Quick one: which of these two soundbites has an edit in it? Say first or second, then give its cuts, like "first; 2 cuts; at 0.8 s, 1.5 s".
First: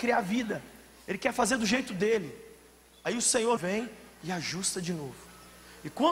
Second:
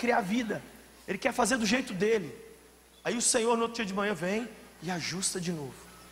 first; 1 cut; at 3.6 s